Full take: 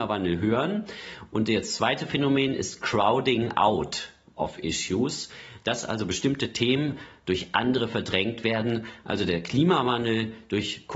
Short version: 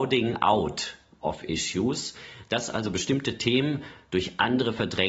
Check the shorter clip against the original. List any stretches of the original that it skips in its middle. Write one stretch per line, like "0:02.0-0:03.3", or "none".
none